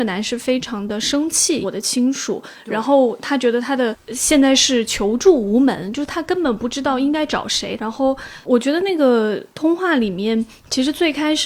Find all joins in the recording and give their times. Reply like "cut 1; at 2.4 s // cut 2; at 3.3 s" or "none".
cut 1; at 1.6 s // cut 2; at 7.8 s